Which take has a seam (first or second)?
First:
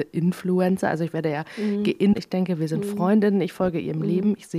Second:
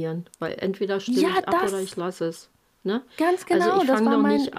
first